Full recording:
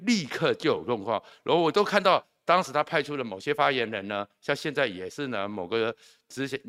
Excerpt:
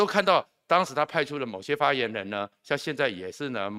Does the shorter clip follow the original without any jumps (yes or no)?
yes